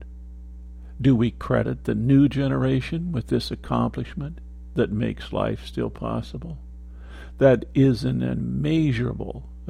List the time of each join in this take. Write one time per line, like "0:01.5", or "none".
none